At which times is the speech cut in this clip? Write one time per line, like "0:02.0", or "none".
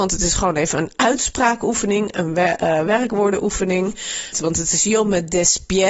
0:04.3